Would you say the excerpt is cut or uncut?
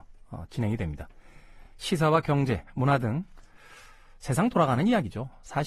uncut